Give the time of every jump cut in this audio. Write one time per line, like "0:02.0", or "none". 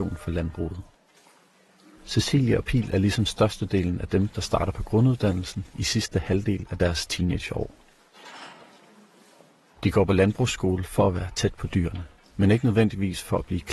none